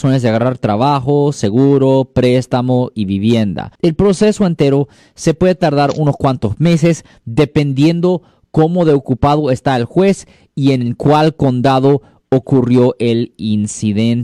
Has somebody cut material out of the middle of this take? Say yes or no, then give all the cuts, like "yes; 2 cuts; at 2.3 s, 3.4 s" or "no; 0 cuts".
yes; 1 cut; at 3.8 s